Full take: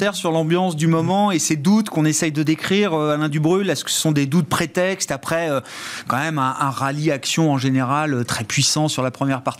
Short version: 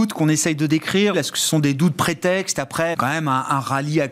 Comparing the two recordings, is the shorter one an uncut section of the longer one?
no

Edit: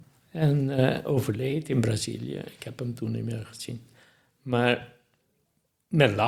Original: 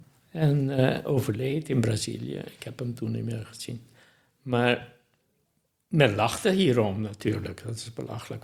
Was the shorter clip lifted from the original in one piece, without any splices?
yes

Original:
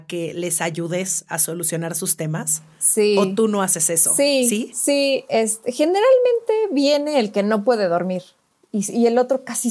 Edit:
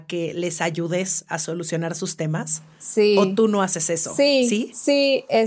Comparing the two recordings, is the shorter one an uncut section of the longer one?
yes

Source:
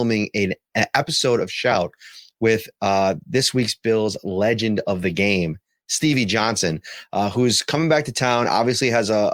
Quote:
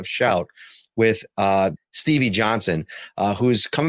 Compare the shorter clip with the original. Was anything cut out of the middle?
yes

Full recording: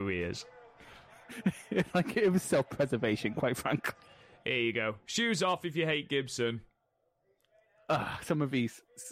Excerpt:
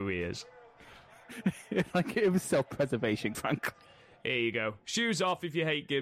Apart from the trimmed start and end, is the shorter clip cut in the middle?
yes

